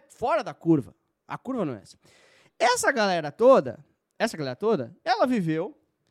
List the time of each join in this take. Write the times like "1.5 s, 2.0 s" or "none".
none